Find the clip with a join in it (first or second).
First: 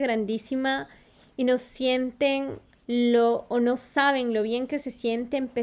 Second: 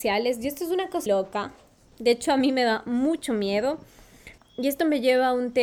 second